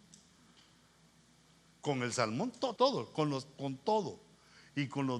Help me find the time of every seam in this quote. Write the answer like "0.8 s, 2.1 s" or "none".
2.8 s